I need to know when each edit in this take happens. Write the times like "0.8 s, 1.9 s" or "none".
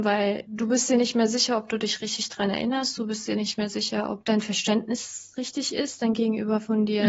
none